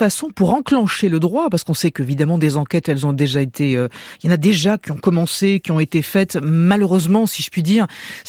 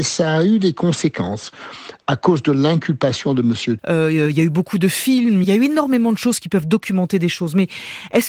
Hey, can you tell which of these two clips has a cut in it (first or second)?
second